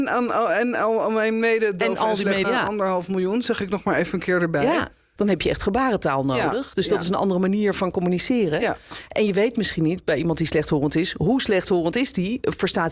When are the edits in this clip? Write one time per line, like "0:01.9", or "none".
0:02.4
0:05.2